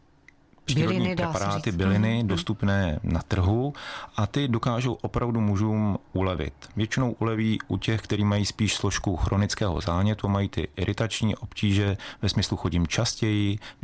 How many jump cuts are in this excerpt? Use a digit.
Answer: 0